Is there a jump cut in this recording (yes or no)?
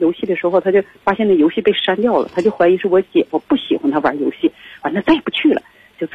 no